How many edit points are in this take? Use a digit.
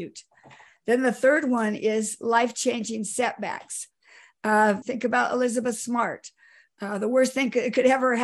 1